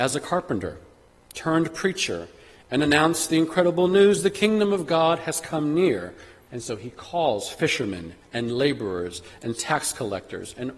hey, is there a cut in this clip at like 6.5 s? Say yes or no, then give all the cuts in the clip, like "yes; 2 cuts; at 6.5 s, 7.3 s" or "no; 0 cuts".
yes; 1 cut; at 6.5 s